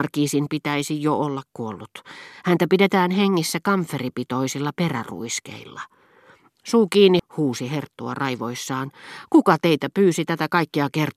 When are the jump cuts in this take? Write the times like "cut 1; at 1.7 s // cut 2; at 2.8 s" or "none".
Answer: cut 1; at 7.2 s